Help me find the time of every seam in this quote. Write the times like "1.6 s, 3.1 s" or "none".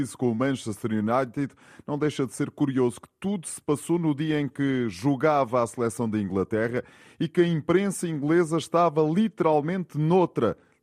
none